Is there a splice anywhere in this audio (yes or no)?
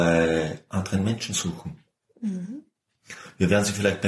no